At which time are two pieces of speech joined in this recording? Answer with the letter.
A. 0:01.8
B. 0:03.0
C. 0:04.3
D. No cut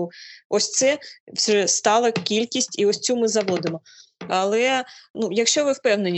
C